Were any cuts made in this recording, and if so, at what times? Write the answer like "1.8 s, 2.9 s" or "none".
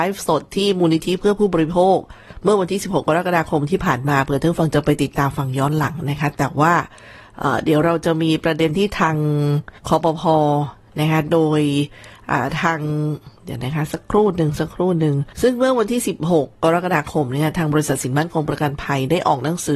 9.8 s, 15.3 s